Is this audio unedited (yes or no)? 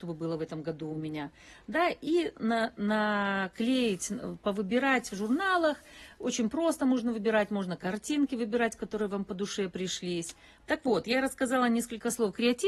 no